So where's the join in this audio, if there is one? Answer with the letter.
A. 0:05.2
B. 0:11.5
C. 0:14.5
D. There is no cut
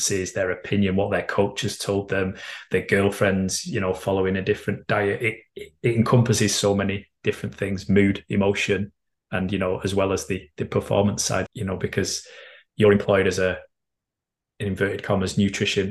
B